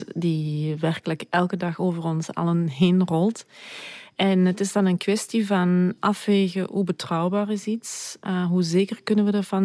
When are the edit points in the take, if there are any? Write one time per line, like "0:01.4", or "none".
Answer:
0:06.0